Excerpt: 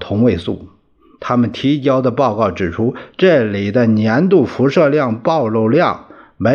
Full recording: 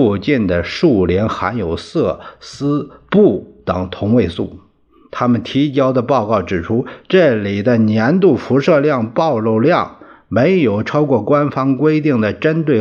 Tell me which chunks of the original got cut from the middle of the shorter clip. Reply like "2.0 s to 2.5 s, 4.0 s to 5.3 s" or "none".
none